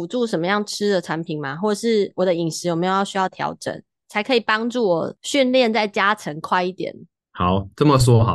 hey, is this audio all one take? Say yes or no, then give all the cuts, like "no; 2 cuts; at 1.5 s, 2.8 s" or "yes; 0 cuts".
yes; 0 cuts